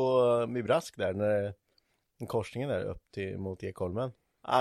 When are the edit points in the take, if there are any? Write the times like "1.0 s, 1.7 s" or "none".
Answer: none